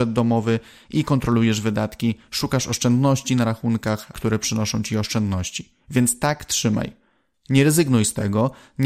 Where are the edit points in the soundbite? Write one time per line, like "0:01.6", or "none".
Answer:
0:04.1

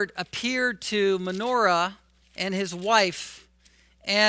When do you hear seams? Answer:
none

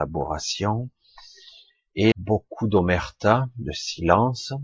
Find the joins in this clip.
0:02.1

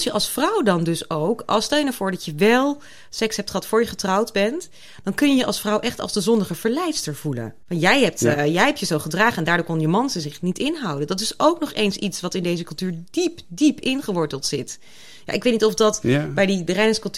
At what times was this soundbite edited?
0:07.6

